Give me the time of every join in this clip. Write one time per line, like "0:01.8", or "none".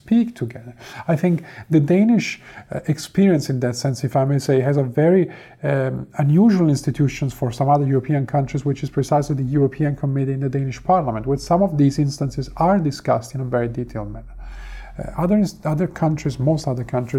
none